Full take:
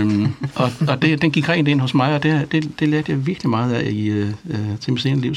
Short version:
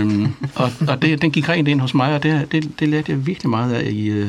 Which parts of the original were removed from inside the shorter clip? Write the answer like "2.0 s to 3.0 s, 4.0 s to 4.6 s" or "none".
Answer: none